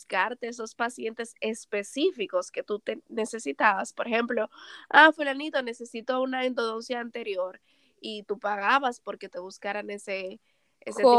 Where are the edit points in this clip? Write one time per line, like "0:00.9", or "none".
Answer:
none